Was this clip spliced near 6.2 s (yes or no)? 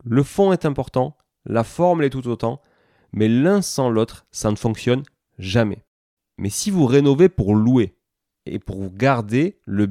yes